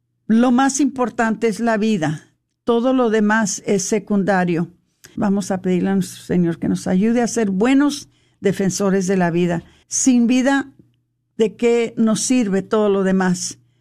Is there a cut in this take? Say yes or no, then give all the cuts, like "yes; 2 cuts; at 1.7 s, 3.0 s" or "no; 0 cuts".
yes; 2 cuts; at 5.2 s, 9.8 s